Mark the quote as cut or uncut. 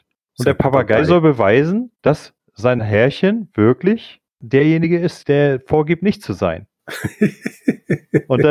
cut